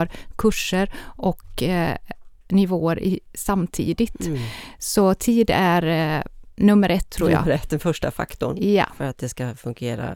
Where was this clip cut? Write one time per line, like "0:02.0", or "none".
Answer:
none